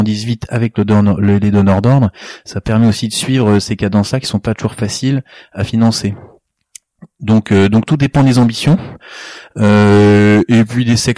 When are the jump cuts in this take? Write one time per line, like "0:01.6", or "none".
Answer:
none